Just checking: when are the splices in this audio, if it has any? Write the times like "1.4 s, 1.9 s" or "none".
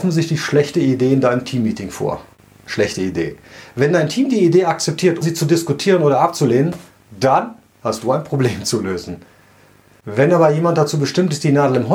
5.2 s